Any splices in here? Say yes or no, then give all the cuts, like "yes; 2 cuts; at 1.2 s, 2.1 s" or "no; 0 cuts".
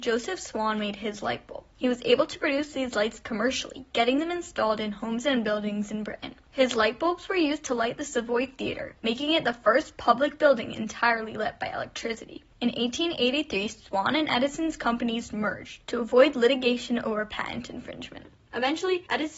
no; 0 cuts